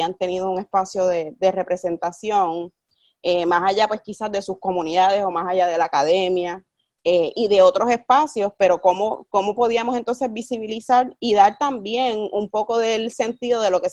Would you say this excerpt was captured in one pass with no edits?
yes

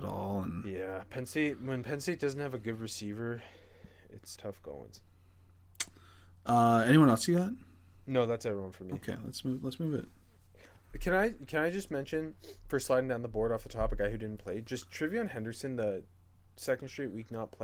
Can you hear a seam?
yes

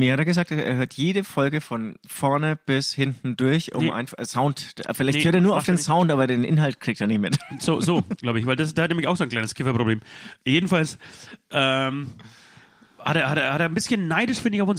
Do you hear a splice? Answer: no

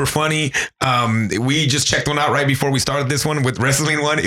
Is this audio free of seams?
yes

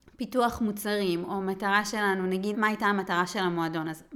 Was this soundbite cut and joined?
yes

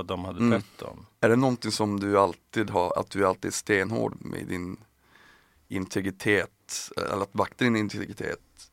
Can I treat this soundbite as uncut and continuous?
no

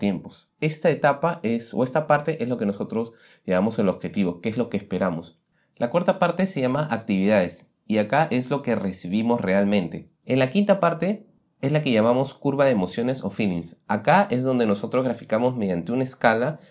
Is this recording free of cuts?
no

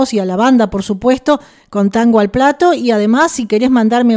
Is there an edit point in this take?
no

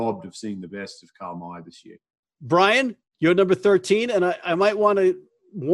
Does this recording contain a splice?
no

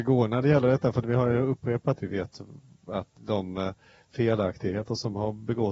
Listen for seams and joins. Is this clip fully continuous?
no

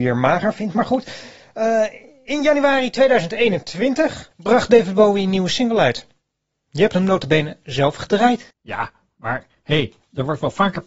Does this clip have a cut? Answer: no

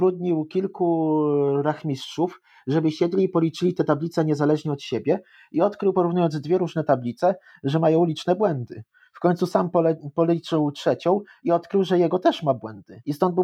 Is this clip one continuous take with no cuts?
yes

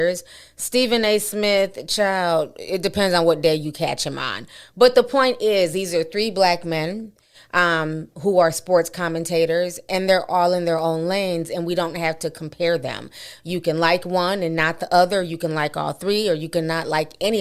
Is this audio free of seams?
yes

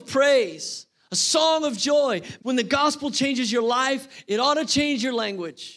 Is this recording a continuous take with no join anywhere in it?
no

